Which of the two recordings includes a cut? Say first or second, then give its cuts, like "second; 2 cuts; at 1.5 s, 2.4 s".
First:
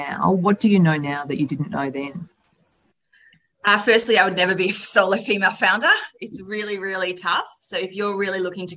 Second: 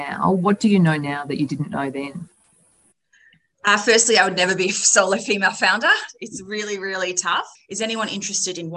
second; 1 cut; at 7.5 s